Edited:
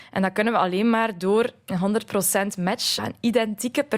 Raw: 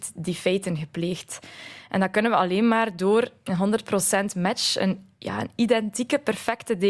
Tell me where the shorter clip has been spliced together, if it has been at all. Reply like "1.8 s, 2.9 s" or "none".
3.0 s